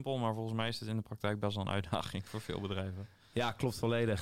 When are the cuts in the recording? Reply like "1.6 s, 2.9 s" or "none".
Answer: none